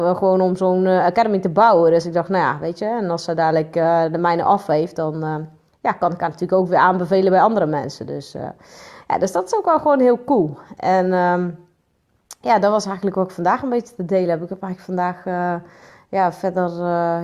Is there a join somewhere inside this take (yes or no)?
no